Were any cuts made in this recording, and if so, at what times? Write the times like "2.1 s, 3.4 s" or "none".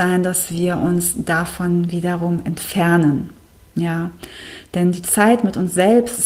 none